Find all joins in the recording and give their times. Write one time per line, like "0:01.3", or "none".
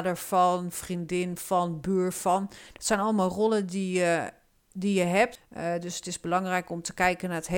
0:05.4